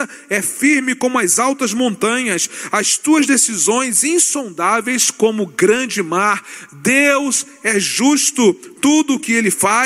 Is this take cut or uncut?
uncut